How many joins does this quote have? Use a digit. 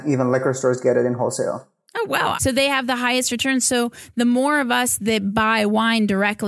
1